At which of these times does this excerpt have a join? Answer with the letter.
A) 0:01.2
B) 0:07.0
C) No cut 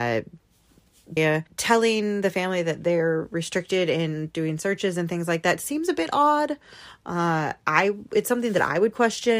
A